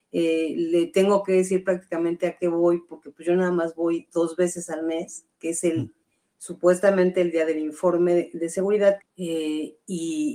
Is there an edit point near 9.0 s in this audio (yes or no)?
yes